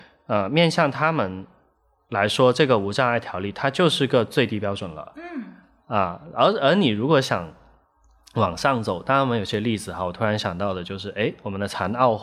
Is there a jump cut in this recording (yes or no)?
no